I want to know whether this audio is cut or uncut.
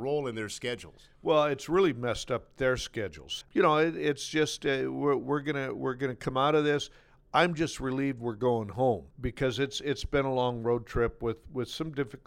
cut